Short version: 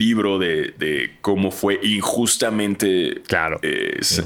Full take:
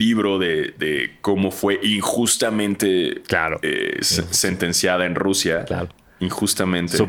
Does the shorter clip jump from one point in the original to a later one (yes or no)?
no